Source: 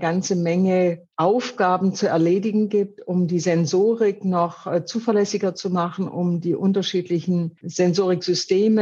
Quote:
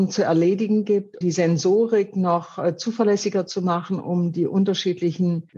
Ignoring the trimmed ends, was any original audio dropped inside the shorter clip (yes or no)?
yes